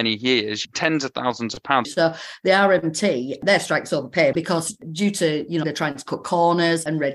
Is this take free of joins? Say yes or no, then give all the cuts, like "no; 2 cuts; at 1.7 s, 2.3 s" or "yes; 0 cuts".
no; 3 cuts; at 1.8 s, 4.3 s, 5.6 s